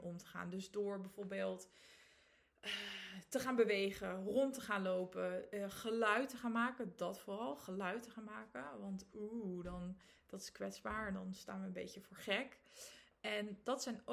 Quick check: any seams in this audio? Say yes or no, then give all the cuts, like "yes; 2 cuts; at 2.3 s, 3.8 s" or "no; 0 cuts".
no; 0 cuts